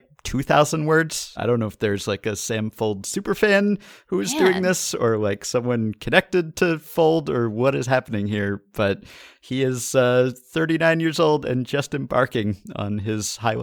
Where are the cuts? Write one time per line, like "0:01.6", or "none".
0:01.4